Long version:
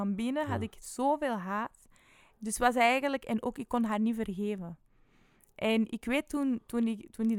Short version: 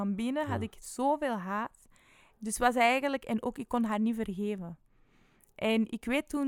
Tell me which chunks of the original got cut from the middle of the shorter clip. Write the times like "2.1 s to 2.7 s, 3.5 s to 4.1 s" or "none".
none